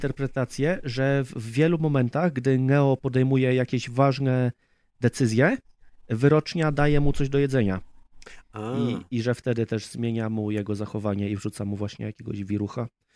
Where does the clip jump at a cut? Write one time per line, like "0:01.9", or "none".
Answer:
none

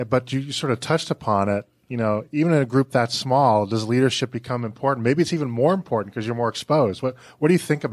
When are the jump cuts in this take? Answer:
none

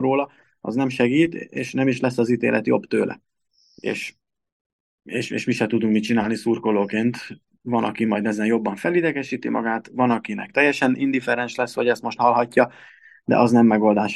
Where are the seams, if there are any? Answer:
none

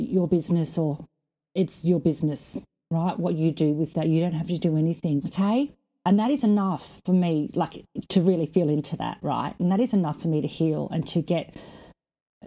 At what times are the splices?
0:05.2

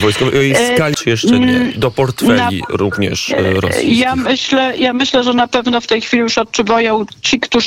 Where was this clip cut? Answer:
0:00.9

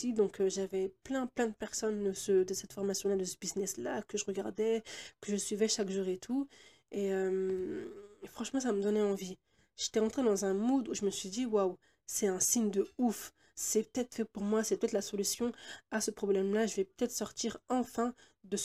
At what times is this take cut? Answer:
none

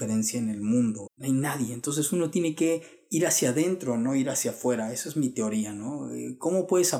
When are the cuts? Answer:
0:01.1

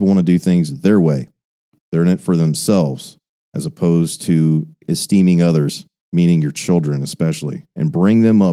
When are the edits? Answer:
none

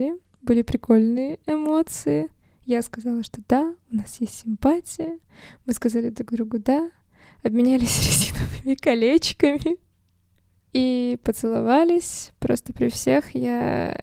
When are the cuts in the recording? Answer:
none

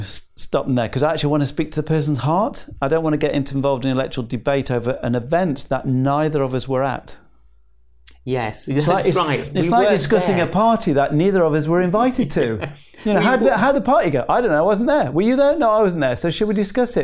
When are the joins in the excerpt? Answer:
none

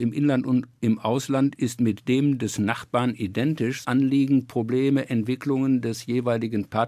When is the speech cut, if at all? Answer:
0:03.8

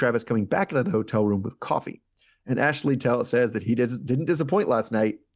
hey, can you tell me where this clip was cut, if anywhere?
none

